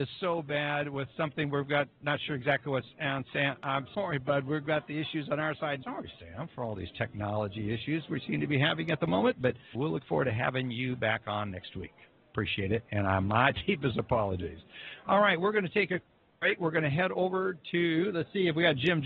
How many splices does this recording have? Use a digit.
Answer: 3